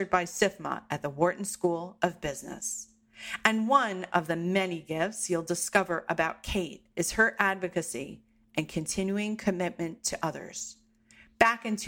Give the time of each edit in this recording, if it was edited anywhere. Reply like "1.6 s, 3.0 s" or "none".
6.9 s